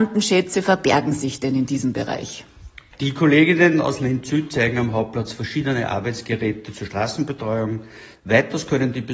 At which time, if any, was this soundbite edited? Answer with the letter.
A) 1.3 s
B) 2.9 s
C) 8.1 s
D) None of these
C